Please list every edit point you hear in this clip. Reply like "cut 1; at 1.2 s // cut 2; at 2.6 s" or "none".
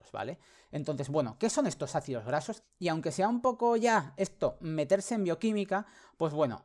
cut 1; at 2.6 s